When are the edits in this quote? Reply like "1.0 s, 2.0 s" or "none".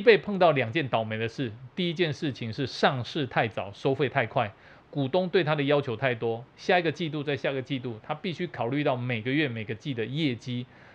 none